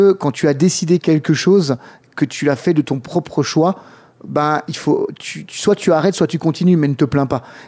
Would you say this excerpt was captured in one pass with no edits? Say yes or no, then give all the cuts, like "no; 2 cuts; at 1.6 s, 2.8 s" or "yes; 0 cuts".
yes; 0 cuts